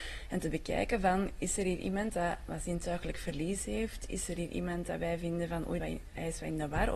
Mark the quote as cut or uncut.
cut